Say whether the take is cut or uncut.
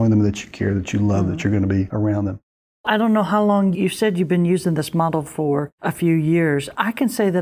cut